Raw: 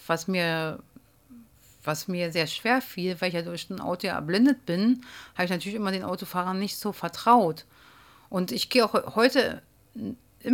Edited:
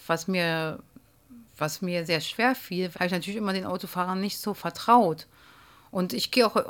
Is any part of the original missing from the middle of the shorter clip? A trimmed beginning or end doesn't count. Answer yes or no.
yes